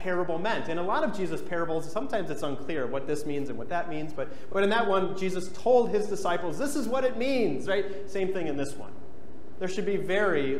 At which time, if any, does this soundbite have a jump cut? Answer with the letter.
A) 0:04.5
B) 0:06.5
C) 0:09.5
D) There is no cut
D